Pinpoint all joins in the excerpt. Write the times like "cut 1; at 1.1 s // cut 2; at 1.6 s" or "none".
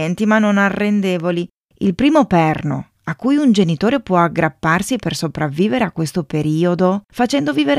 cut 1; at 1.6 s